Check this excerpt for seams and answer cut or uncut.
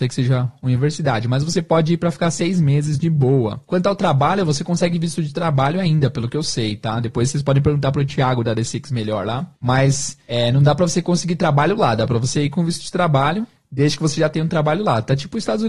cut